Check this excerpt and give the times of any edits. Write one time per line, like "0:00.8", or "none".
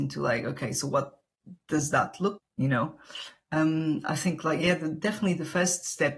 0:02.4